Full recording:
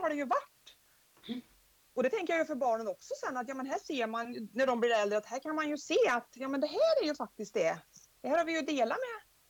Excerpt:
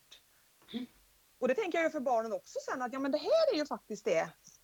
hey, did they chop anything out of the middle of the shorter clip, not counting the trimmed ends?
yes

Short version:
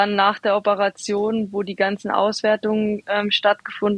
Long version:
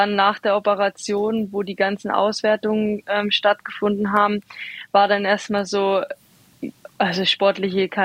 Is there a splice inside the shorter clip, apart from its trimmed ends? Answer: no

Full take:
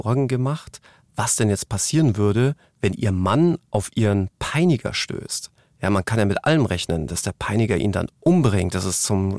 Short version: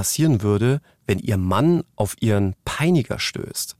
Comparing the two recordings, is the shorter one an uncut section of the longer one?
yes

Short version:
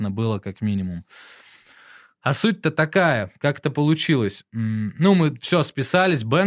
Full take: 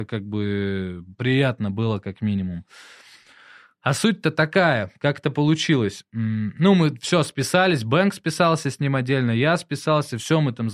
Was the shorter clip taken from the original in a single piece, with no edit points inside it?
yes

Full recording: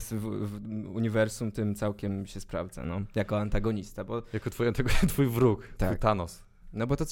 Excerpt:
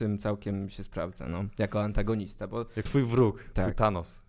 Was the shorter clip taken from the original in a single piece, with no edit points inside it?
no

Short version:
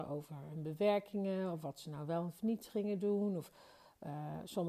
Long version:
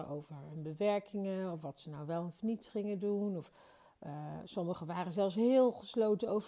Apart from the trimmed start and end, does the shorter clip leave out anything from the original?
no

